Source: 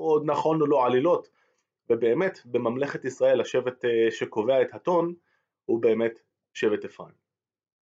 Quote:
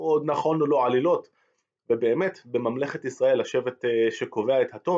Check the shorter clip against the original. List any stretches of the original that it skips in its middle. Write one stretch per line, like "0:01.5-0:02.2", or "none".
none